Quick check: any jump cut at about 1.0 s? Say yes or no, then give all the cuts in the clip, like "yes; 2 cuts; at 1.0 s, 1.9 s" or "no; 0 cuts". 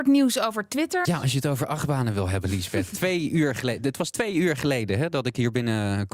yes; 1 cut; at 1.0 s